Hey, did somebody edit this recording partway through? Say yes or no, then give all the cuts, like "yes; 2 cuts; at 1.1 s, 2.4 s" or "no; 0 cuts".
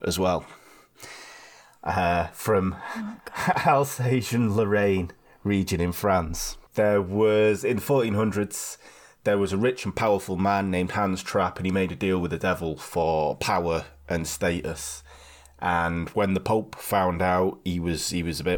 yes; 1 cut; at 6.7 s